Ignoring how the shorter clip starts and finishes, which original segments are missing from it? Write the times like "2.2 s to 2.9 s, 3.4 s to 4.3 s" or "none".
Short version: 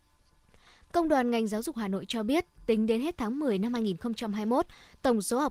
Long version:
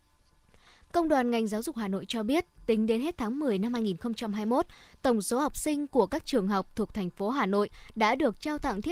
none